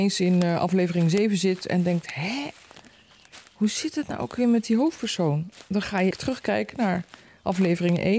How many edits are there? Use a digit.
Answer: 1